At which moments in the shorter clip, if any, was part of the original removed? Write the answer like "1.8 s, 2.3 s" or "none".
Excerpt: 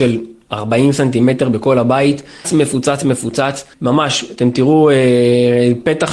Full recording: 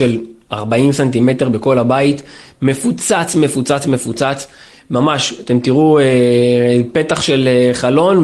2.4 s, 3.7 s